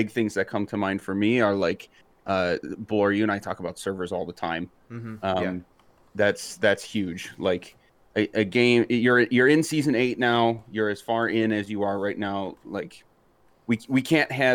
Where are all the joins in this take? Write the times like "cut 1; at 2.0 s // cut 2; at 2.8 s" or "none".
none